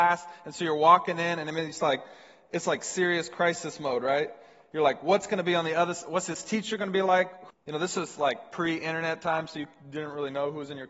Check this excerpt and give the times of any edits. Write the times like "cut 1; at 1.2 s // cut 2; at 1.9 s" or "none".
cut 1; at 7.5 s